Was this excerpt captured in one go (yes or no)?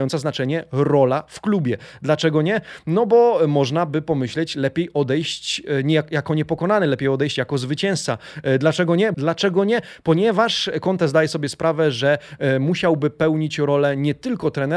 no